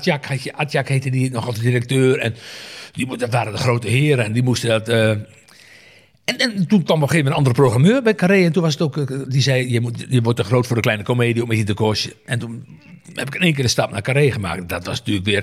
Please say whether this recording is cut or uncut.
uncut